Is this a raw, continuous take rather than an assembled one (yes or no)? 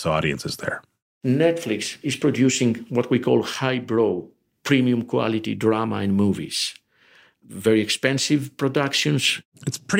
yes